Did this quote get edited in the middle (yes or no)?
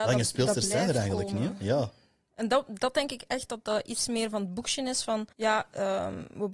yes